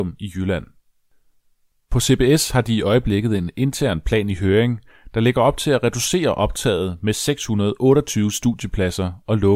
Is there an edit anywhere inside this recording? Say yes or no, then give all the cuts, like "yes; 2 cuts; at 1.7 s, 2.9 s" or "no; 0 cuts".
no; 0 cuts